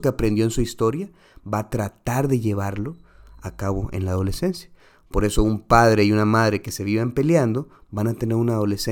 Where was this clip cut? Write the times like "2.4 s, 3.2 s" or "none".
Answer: none